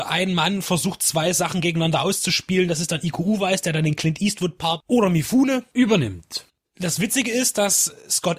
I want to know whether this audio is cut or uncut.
uncut